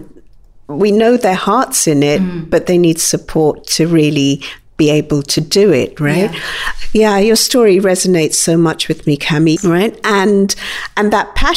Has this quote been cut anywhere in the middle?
yes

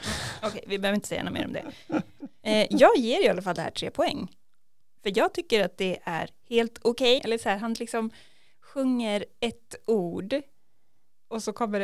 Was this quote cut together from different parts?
yes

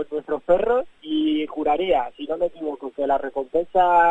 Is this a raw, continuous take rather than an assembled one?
no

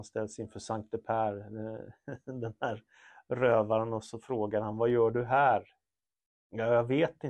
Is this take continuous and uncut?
yes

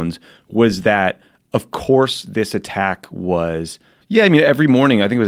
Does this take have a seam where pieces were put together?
yes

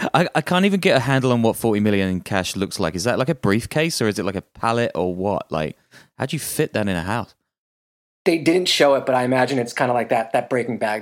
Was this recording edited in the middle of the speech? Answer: no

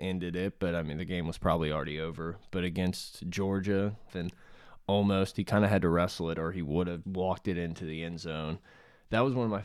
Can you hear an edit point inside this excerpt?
yes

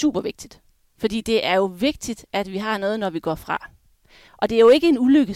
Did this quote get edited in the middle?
yes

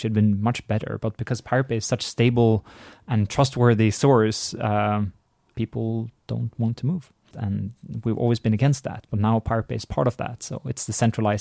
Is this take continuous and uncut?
no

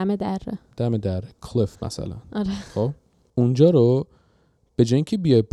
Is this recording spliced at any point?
no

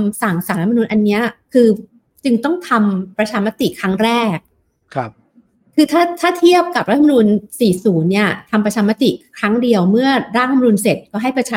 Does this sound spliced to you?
no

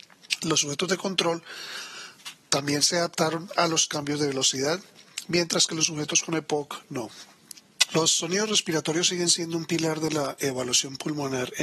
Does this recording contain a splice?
yes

